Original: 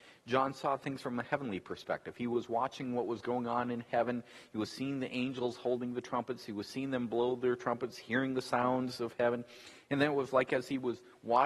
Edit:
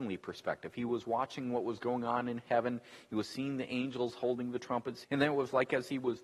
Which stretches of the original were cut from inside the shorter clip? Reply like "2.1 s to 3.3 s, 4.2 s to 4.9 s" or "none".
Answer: 6.5 s to 9.8 s